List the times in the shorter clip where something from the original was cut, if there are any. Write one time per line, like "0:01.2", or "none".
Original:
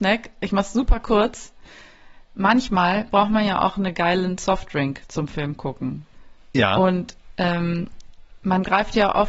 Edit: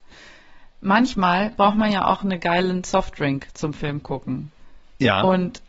none